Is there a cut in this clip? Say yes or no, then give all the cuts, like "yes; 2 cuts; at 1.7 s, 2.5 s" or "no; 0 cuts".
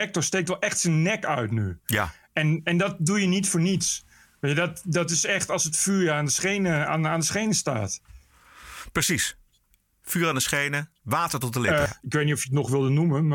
no; 0 cuts